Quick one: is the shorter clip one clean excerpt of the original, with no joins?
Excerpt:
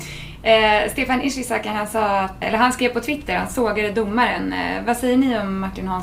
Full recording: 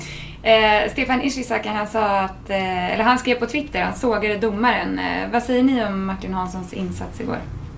no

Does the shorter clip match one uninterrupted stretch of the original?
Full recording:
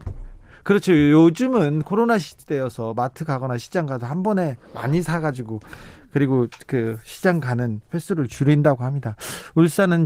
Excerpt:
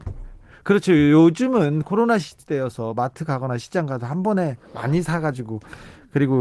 yes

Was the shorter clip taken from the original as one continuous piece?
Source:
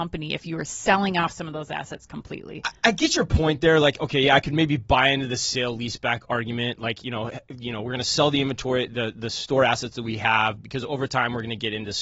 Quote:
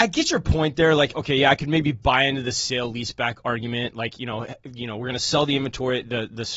yes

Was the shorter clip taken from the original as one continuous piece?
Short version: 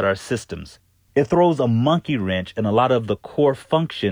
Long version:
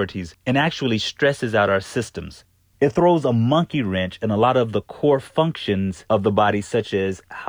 yes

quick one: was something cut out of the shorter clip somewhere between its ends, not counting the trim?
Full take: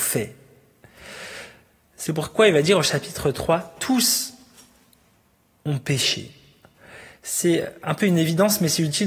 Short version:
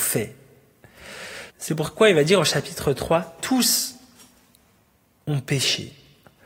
yes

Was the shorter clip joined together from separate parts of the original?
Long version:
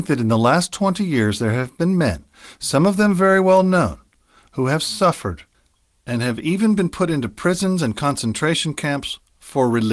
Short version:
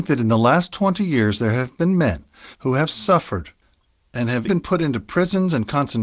yes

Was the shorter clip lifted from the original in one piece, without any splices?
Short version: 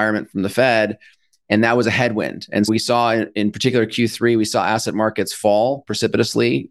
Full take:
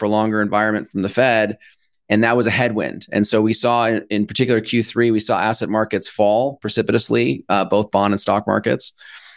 no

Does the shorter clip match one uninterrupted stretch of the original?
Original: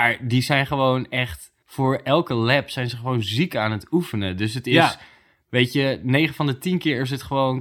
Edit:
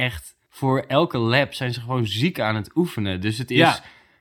yes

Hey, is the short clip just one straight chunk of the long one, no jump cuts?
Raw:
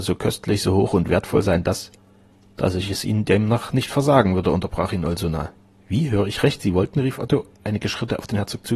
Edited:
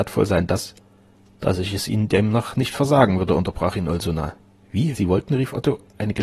no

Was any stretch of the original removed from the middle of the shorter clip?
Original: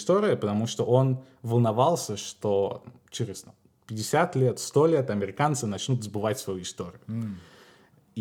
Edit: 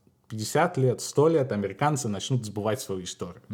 no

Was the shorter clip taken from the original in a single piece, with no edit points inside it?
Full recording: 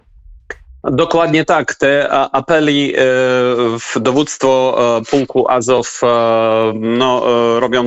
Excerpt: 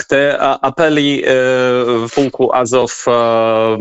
no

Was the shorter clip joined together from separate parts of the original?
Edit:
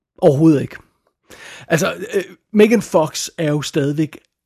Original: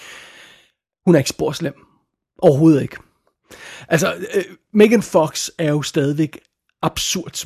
no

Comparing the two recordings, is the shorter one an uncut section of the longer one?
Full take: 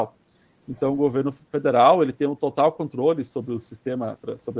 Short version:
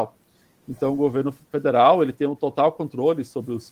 yes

